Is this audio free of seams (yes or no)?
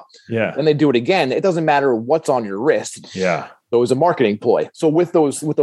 no